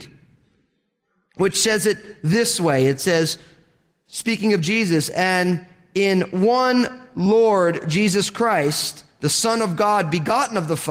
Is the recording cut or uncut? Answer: uncut